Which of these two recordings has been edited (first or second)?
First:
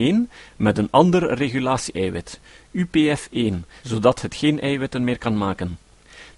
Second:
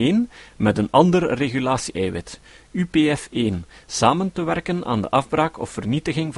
first